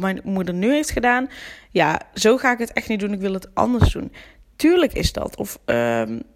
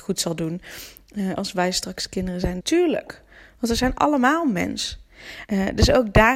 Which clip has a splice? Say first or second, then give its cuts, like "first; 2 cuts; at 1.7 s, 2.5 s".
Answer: second; 2 cuts; at 2.6 s, 5.5 s